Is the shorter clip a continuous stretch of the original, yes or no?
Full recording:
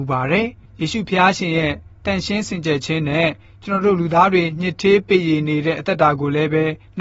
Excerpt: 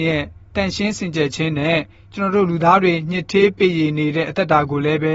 yes